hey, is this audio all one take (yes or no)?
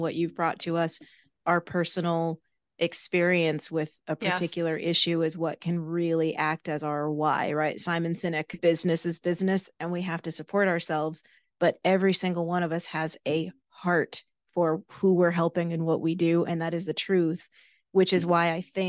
no